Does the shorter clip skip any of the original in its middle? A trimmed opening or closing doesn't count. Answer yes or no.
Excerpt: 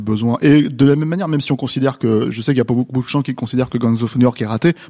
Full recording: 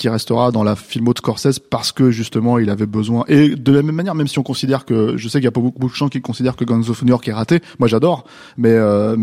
no